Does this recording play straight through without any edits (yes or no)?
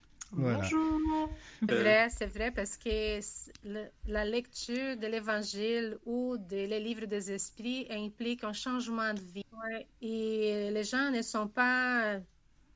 no